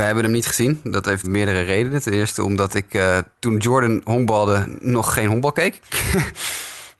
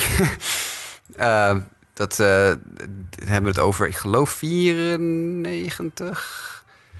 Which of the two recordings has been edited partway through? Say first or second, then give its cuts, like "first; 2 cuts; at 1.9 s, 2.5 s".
first; 2 cuts; at 1.2 s, 3.3 s